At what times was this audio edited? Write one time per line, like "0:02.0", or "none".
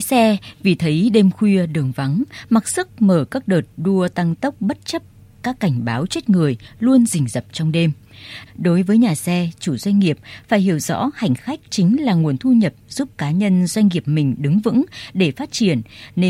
0:08.5